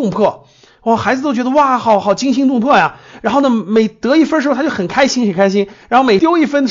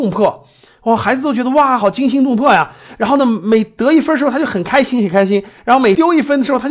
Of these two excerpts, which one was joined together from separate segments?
second; 1 cut; at 1.8 s

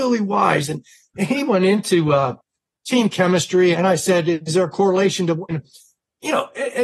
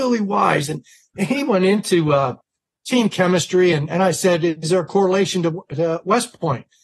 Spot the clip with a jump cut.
first; 2 cuts; at 3.7 s, 5.5 s

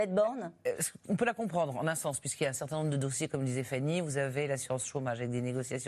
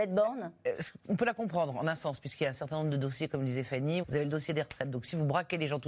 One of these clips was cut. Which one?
second; 1 cut; at 4.0 s

